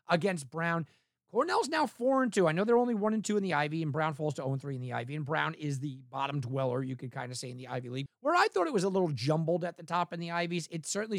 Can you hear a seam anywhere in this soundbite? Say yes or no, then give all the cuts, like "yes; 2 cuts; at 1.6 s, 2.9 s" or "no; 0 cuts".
yes; 1 cut; at 8.1 s